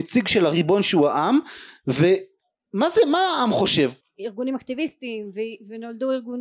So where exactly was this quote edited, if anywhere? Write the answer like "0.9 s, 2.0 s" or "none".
4.0 s